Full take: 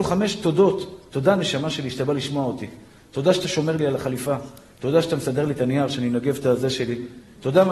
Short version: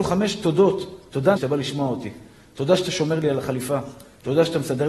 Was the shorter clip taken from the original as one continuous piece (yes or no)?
no